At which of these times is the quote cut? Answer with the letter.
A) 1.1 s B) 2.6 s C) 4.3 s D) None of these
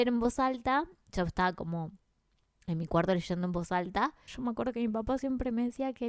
C